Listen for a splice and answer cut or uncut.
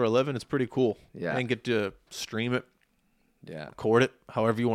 cut